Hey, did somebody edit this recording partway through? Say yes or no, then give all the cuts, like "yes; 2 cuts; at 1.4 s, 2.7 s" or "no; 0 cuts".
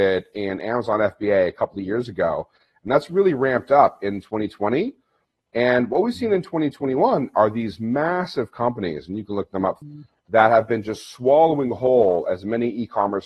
yes; 1 cut; at 9.8 s